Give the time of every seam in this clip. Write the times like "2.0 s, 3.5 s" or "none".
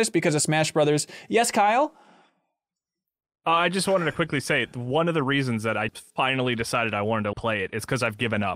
5.9 s, 7.3 s